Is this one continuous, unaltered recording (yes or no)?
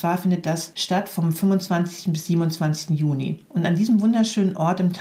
no